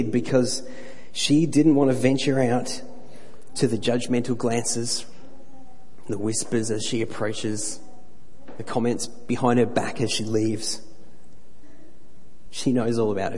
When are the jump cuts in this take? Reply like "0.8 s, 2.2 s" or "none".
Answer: none

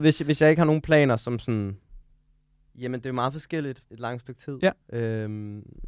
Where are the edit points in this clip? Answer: 2.7 s, 3.8 s

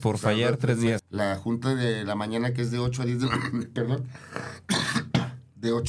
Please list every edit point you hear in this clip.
1.0 s

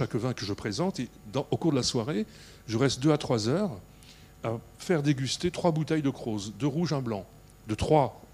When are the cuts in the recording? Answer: none

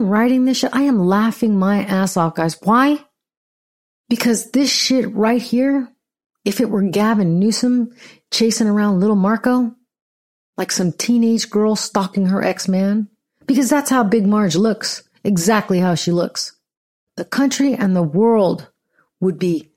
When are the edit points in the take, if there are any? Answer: none

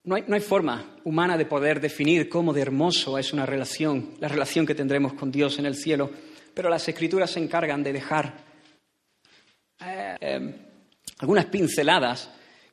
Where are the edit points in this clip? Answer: 10.2 s

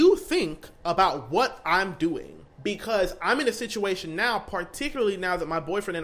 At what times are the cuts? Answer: 2.5 s

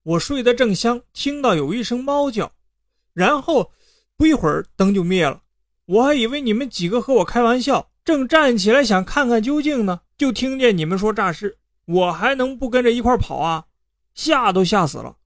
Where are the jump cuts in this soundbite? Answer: none

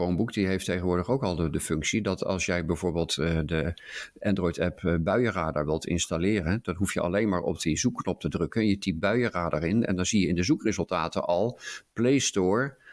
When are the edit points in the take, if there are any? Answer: none

